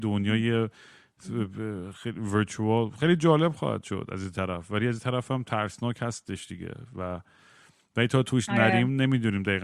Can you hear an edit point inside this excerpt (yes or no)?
no